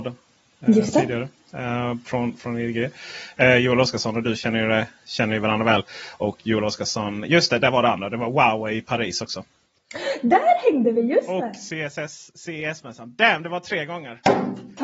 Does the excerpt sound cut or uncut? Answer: uncut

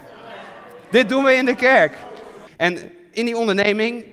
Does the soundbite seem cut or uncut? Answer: cut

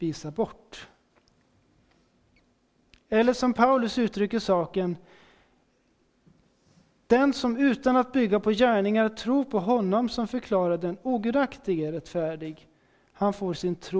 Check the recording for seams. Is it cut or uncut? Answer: uncut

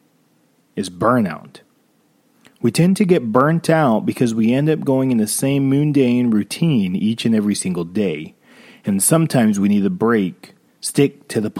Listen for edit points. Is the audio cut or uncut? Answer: cut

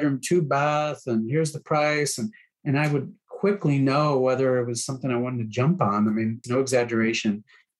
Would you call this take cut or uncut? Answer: cut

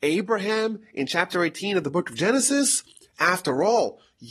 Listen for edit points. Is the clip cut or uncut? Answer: uncut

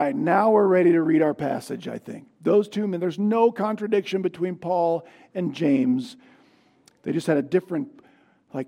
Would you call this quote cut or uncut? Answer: uncut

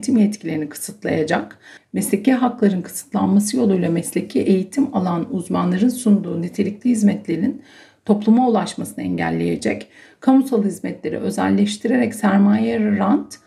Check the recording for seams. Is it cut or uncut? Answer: cut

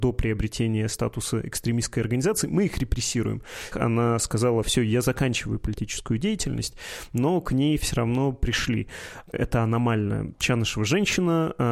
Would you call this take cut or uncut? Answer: cut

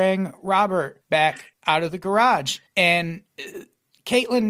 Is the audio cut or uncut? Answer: uncut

